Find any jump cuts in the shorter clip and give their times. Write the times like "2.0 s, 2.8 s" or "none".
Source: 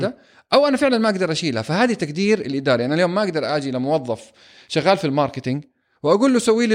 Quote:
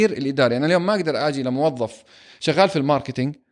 none